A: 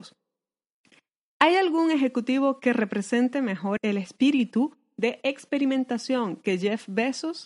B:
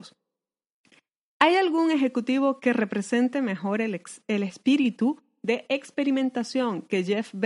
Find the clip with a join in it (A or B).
A